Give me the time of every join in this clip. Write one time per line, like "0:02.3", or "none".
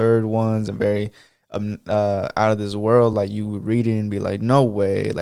none